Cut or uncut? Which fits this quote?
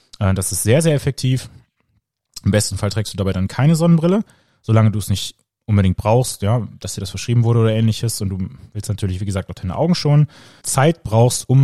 cut